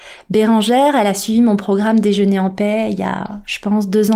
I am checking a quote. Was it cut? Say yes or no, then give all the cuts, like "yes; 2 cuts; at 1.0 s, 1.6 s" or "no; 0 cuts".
no; 0 cuts